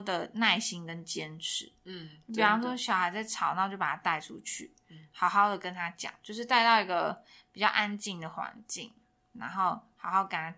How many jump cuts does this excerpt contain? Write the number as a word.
zero